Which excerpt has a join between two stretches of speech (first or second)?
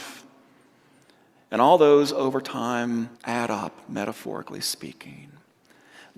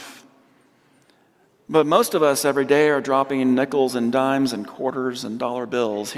first